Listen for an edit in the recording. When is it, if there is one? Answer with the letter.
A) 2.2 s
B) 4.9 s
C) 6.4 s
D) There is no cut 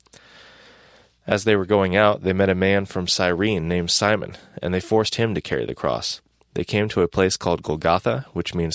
D